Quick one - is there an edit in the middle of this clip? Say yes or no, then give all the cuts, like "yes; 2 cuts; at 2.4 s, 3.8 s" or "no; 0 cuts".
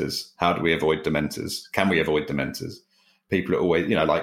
no; 0 cuts